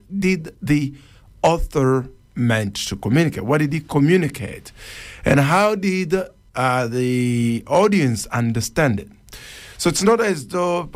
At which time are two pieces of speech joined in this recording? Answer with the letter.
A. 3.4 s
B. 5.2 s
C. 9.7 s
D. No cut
D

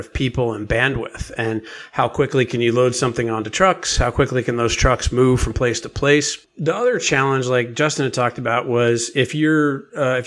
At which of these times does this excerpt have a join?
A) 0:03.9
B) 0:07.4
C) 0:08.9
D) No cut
D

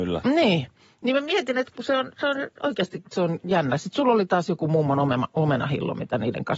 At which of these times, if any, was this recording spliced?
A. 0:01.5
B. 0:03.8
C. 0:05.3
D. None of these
D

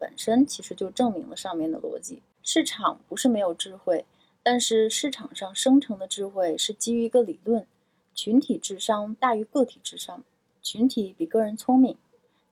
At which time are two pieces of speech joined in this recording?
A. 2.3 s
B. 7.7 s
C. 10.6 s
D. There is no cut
D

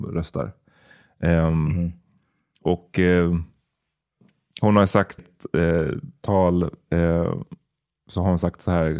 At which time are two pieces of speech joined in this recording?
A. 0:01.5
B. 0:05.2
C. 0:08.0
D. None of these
B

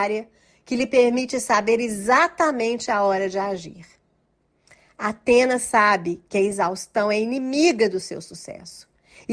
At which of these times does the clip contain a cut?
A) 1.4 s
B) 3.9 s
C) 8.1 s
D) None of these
D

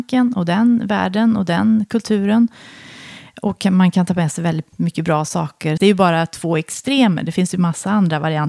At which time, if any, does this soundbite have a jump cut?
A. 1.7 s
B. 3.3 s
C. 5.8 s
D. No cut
C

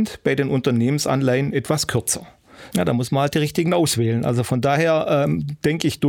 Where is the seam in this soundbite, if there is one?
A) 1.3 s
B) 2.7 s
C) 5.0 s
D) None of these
B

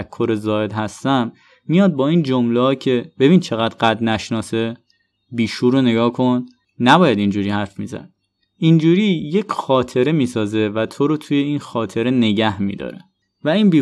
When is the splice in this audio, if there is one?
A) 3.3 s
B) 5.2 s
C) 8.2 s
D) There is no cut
D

